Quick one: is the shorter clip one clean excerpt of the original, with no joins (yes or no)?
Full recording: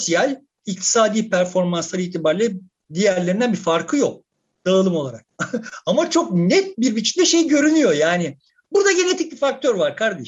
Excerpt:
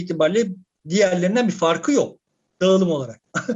yes